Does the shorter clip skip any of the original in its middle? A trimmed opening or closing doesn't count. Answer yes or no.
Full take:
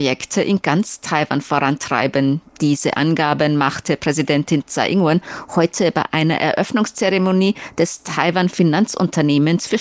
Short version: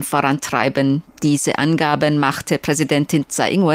no